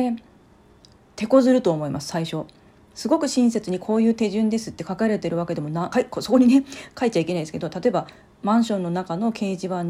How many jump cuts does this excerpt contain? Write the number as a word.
one